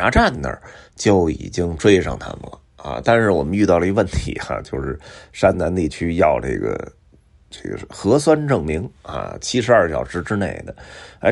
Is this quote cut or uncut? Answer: uncut